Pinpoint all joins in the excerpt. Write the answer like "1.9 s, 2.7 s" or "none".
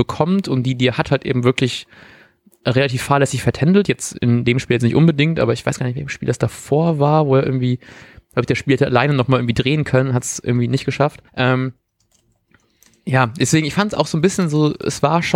11.3 s